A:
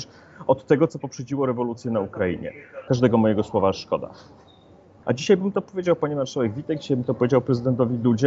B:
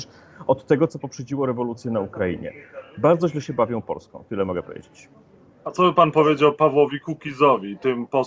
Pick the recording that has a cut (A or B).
A